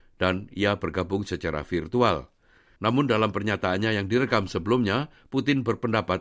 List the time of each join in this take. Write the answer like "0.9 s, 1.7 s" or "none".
2.8 s